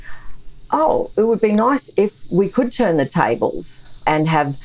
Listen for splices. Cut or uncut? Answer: uncut